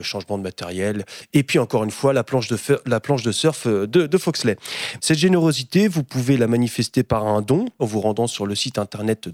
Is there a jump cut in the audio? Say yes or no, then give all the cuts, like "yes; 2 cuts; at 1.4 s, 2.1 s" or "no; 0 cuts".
yes; 2 cuts; at 5.0 s, 7.8 s